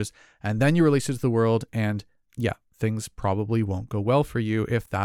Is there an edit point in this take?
no; 0 cuts

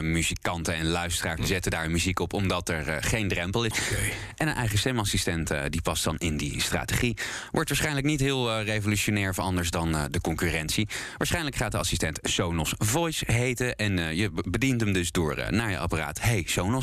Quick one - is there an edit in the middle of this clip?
yes; 2 cuts; at 1.4 s, 3.7 s

